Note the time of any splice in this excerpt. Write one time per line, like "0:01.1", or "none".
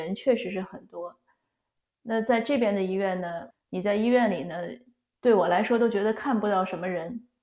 0:03.5